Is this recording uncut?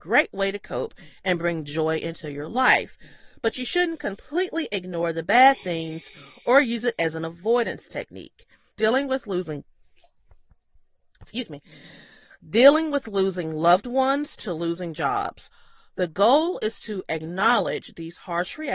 no; 1 cut; at 8.7 s

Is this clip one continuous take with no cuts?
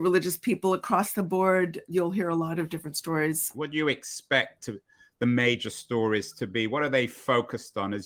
no; 2 cuts; at 1.9 s, 3.5 s

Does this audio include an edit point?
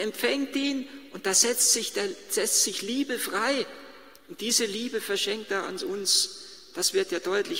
yes; 1 cut; at 4.2 s

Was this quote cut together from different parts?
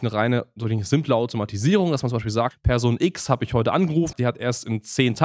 yes; 2 cuts; at 2.5 s, 4.1 s

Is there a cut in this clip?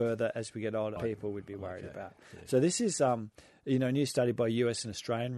yes; 1 cut; at 1.0 s

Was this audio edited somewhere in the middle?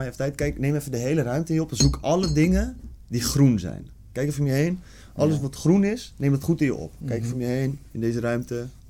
no; 0 cuts

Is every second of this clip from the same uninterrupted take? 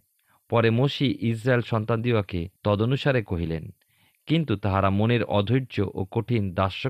no; 1 cut; at 2.6 s

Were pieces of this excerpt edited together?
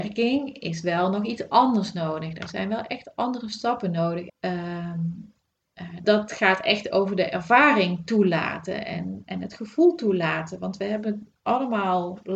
yes; 2 cuts; at 4.3 s, 6.0 s

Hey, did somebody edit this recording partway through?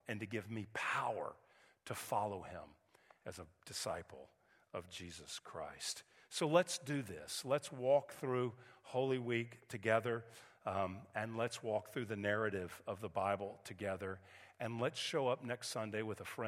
no; 0 cuts

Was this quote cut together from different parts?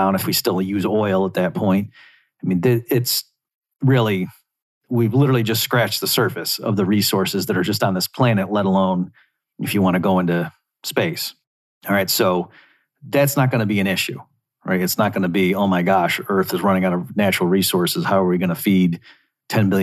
no; 0 cuts

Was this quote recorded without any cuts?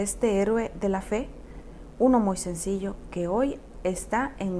yes; 0 cuts

